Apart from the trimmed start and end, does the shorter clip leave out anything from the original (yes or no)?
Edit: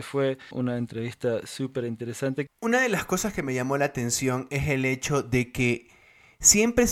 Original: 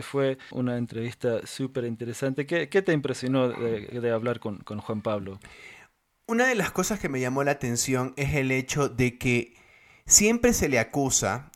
yes